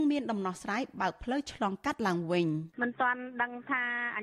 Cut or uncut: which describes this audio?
cut